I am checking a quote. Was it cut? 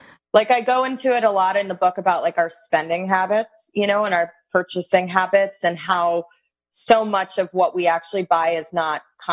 no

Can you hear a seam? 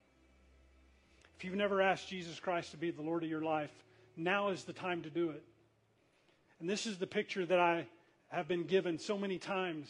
no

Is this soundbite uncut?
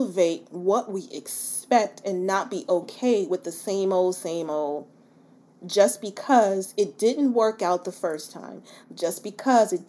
no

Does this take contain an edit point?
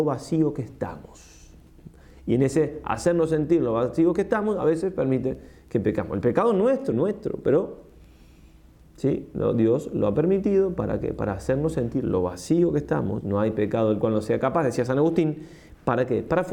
yes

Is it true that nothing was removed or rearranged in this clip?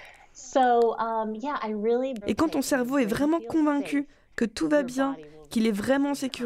no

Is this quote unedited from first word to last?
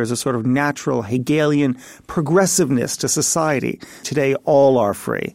no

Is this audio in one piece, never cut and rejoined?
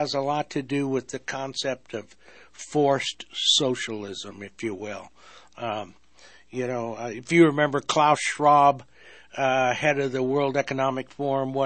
yes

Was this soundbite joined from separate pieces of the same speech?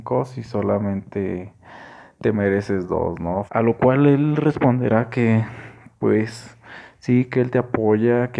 yes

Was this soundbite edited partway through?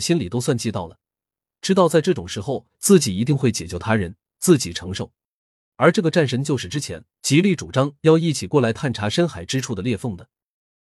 yes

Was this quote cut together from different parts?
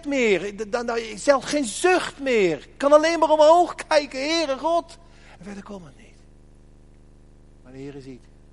yes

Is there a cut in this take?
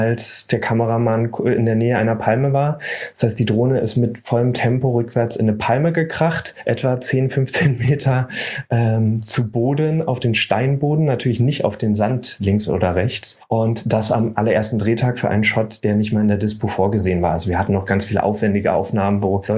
no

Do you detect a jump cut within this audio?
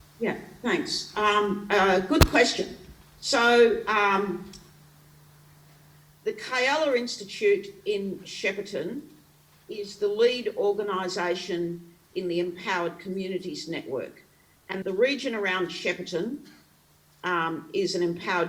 yes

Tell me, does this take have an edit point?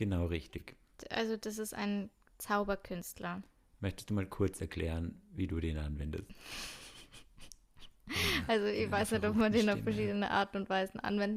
no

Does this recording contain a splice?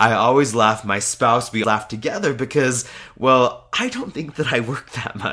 yes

